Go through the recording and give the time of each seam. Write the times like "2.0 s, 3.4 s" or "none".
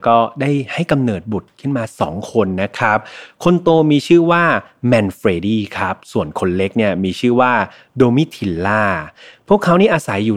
none